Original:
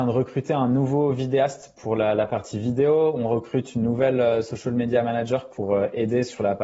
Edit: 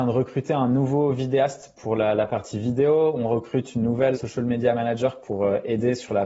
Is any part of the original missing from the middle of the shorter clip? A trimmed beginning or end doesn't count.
yes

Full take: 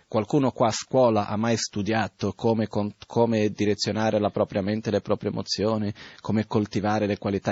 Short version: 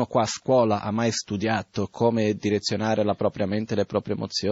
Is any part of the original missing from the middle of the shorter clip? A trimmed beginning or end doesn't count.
yes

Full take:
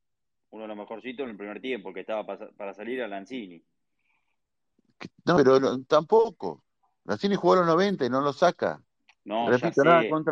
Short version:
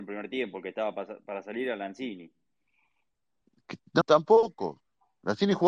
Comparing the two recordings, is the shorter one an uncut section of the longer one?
no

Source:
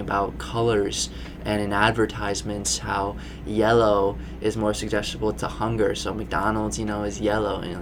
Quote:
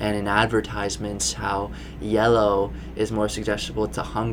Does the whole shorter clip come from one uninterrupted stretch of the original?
yes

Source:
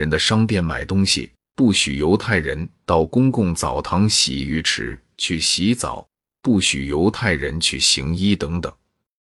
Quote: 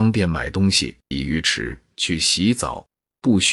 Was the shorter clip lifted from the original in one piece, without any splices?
no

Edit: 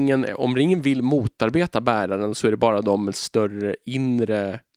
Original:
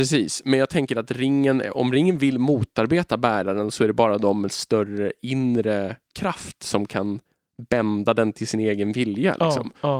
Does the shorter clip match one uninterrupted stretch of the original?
yes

